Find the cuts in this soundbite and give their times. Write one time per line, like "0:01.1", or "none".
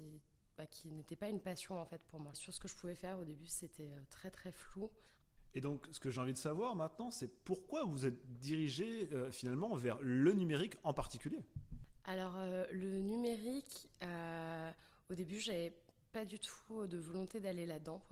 0:02.3